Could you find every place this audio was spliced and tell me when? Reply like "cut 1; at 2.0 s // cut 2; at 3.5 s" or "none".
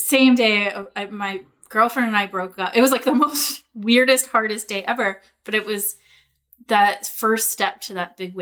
none